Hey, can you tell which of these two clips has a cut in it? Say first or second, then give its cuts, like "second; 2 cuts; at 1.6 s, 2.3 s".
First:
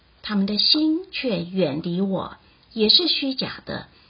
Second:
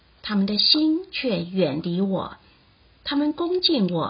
first; 1 cut; at 2.6 s